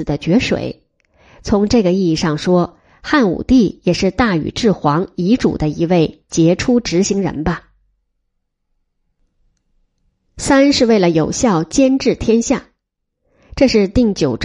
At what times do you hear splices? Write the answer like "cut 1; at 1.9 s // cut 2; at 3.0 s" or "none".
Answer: none

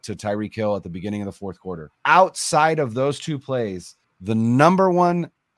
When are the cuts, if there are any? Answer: cut 1; at 1.9 s // cut 2; at 4.0 s

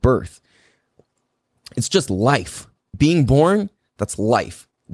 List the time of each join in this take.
cut 1; at 2.9 s

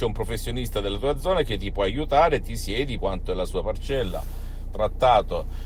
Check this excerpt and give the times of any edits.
cut 1; at 3.0 s // cut 2; at 4.7 s

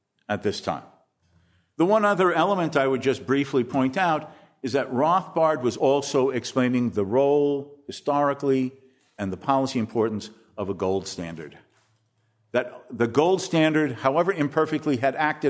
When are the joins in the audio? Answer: none

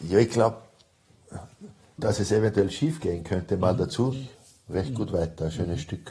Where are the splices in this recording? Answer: cut 1; at 2.0 s // cut 2; at 4.1 s

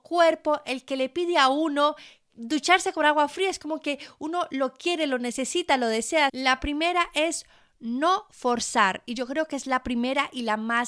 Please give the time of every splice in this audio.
cut 1; at 2.3 s // cut 2; at 6.3 s

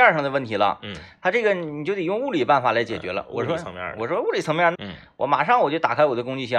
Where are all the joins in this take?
cut 1; at 4.7 s

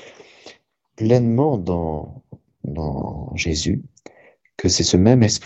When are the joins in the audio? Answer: none

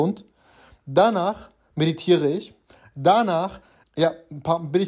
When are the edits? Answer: cut 1; at 3.8 s

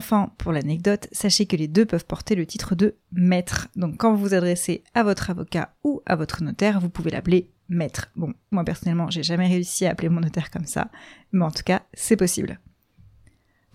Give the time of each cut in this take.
cut 1; at 8.5 s

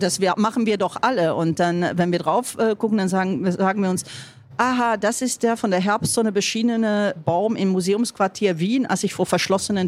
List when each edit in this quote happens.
cut 1; at 7.2 s

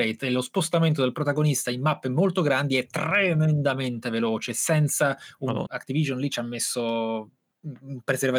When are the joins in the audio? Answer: cut 1; at 5.7 s

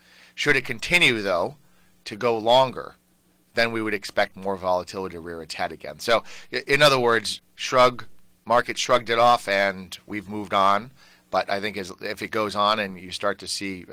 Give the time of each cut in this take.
none

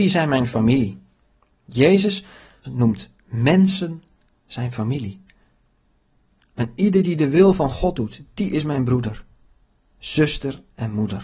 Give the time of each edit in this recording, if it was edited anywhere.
cut 1; at 2.6 s

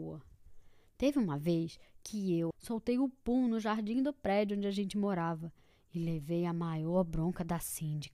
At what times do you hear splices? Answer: cut 1; at 2.5 s

